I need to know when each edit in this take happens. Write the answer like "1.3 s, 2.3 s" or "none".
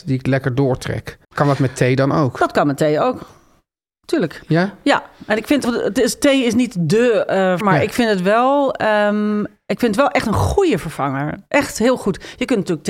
1.2 s, 5.6 s, 7.6 s

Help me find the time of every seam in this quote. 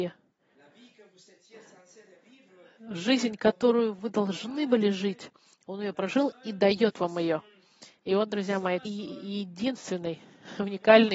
8.9 s

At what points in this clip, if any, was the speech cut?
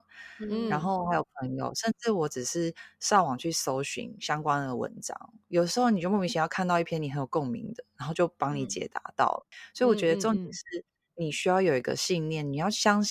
none

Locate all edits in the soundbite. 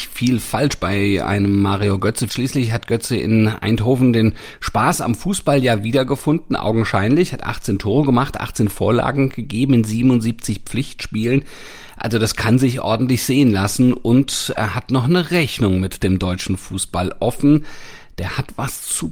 2.3 s

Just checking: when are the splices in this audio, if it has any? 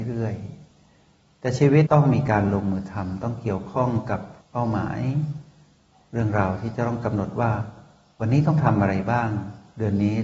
1.9 s

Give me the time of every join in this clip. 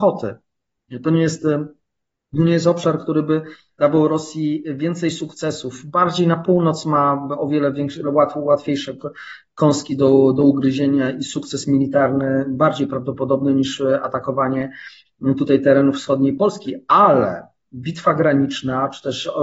none

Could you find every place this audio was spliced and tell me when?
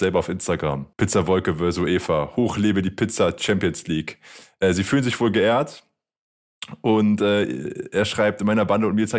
0.9 s

